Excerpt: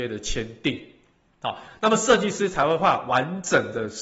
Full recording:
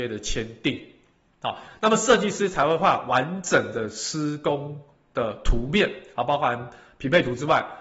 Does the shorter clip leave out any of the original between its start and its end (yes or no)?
no